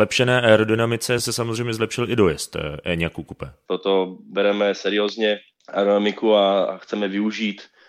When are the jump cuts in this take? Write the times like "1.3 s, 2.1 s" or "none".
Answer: 3.7 s